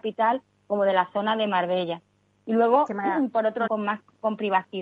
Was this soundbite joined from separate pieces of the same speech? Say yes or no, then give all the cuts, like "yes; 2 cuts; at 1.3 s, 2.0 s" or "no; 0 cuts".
yes; 1 cut; at 3.7 s